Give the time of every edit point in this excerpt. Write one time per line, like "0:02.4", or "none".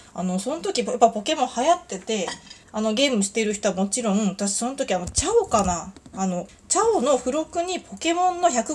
0:02.6
0:06.5